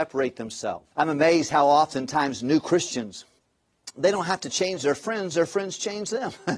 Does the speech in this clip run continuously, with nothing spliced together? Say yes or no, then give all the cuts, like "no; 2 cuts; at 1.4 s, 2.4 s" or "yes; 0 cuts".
no; 1 cut; at 0.9 s